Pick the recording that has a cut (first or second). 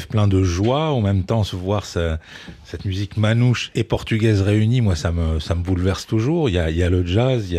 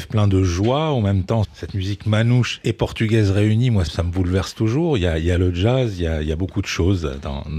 second